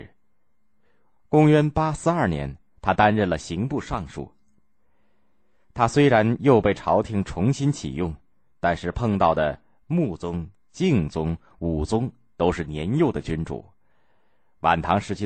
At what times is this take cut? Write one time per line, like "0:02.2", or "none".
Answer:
none